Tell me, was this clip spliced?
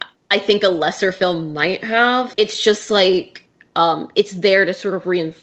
yes; 1 cut; at 2.3 s

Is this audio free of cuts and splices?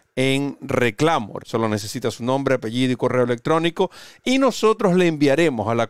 no; 1 cut; at 1.4 s

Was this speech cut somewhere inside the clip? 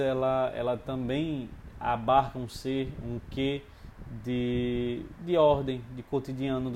no; 0 cuts

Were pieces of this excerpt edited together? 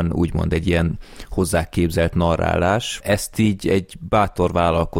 no; 0 cuts

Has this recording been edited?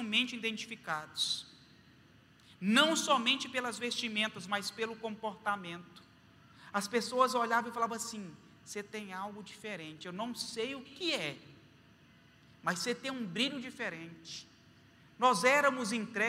yes; 1 cut; at 10.9 s

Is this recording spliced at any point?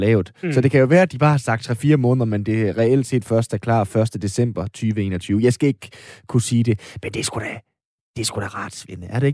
no; 0 cuts

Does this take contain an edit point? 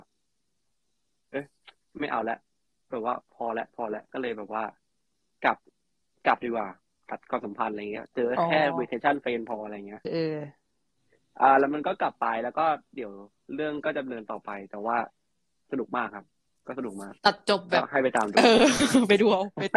yes; 2 cuts; at 10.0 s, 17.2 s

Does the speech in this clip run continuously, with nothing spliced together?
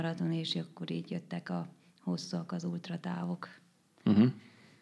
yes; 0 cuts

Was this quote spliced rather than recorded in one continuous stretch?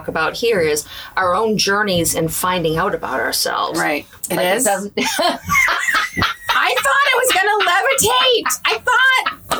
yes; 1 cut; at 4.2 s

